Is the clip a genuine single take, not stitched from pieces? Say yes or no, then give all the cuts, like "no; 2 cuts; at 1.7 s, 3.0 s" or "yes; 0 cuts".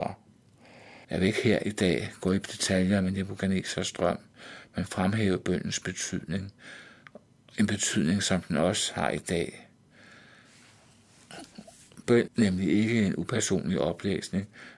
no; 2 cuts; at 1.0 s, 12.3 s